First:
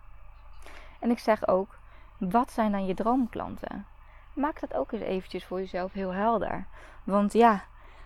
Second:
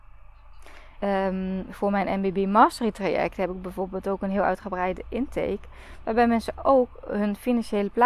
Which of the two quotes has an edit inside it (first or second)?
second